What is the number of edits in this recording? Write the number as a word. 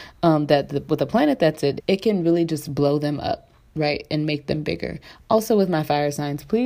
one